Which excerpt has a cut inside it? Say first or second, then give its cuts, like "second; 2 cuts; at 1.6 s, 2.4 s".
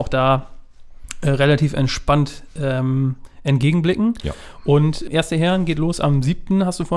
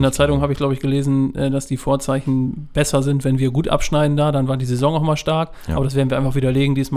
first; 1 cut; at 5.1 s